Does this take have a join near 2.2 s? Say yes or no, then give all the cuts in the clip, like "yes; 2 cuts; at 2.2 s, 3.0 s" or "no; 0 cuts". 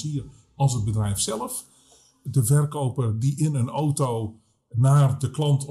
yes; 1 cut; at 2.2 s